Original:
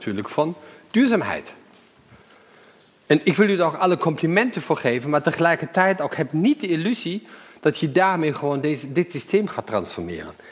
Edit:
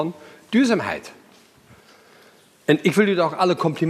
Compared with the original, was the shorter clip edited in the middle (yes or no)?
no